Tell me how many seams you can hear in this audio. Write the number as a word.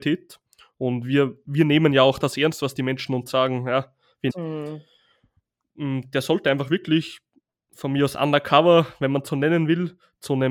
one